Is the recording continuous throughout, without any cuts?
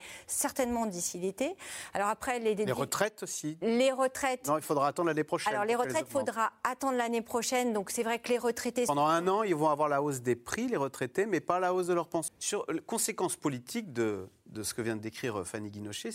no; 1 cut; at 12.3 s

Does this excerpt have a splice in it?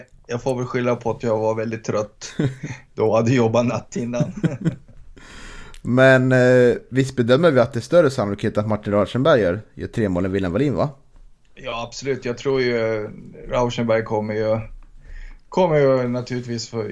no; 0 cuts

